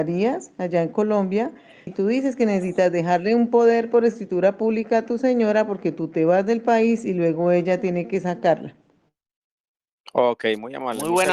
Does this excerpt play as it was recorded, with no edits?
no; 1 cut; at 1.9 s

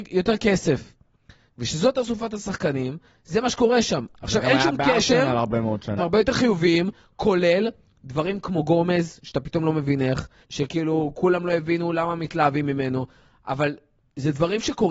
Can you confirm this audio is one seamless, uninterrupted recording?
no; 2 cuts; at 6.0 s, 10.4 s

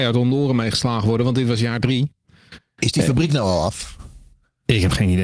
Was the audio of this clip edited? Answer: yes; 1 cut; at 2.8 s

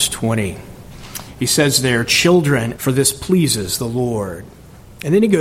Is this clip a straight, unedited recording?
no; 1 cut; at 2.8 s

